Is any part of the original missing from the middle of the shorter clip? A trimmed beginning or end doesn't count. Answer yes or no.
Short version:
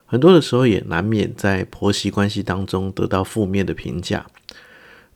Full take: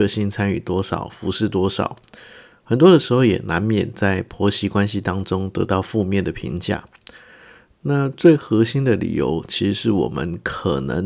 no